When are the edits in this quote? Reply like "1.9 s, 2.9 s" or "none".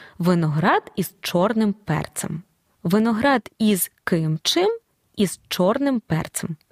2.7 s